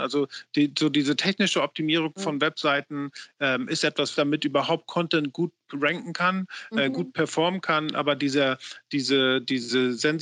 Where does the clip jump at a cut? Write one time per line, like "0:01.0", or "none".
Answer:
0:04.1